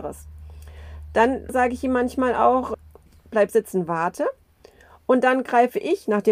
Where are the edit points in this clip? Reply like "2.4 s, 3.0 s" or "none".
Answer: none